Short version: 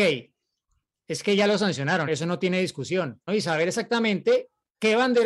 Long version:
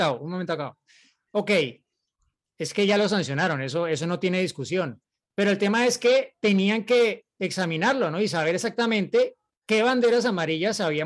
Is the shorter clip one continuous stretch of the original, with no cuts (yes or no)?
no